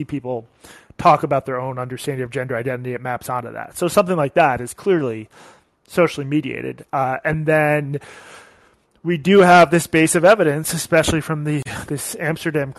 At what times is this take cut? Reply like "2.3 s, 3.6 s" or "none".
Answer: none